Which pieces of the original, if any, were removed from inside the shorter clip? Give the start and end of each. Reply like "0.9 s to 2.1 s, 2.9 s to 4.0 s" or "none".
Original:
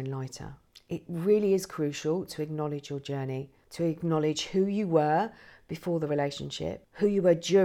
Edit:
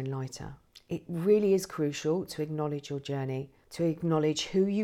none

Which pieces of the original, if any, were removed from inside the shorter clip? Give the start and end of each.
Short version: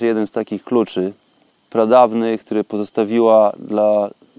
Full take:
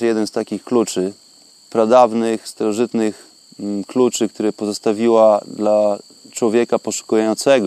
2.4 s to 4.3 s

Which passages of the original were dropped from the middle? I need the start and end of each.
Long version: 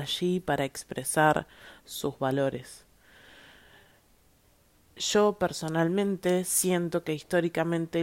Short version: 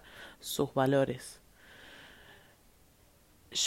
none

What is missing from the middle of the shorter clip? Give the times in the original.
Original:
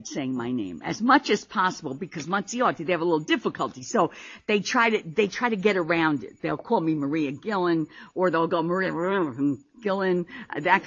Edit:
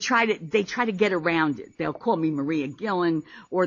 none

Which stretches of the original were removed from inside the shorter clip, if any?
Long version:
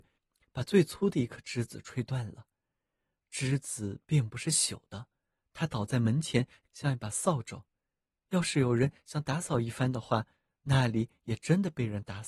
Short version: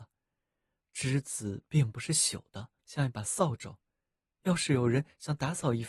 5.2 s to 6.7 s

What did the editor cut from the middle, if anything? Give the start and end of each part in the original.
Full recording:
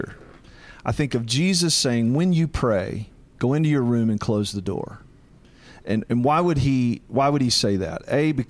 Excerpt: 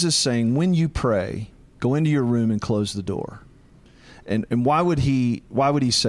none

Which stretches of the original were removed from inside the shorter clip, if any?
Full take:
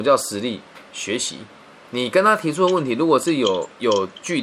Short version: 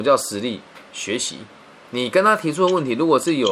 none

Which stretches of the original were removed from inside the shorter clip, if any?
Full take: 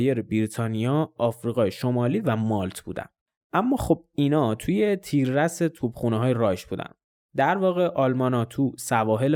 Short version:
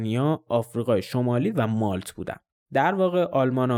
3.2 s to 7.1 s

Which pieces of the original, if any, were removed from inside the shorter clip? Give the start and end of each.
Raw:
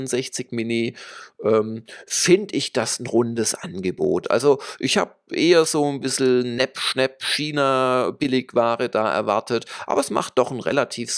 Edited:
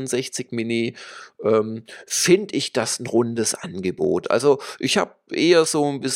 none

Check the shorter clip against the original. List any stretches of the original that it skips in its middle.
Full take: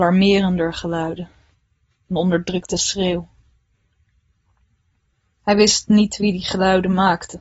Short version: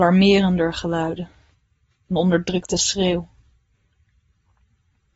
none

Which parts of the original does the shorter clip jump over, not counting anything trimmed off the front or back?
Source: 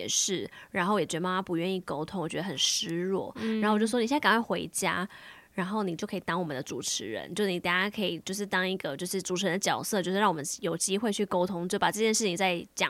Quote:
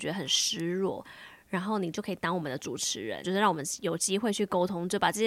3.3 s to 5.1 s, 7.3 s to 10.0 s

